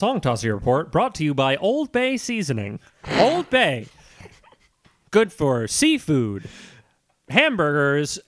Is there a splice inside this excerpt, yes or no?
no